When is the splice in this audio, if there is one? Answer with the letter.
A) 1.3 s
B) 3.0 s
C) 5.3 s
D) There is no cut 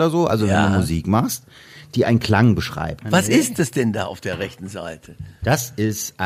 B